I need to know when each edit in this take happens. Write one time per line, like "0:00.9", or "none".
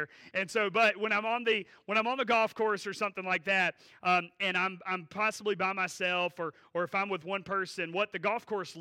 none